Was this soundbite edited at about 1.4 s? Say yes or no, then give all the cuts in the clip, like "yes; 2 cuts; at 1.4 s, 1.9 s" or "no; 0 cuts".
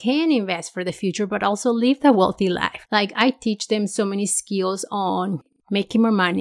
no; 1 cut; at 2.8 s